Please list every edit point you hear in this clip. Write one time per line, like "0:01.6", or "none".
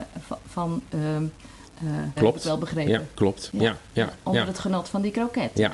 0:02.2